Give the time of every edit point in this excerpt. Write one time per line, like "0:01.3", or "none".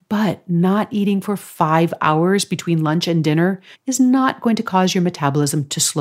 0:03.7